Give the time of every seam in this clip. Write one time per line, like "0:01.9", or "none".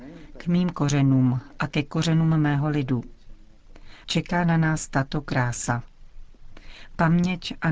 0:04.0